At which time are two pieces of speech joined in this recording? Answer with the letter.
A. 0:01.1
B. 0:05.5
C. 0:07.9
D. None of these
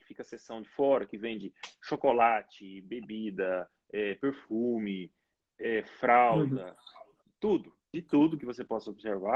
C